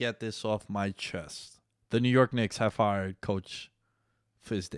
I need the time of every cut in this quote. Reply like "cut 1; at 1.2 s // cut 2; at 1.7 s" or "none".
none